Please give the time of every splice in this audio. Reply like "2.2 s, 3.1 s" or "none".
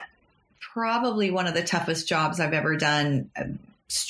none